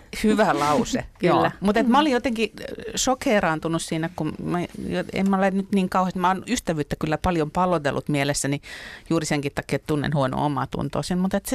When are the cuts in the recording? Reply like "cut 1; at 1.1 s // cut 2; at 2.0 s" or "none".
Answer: none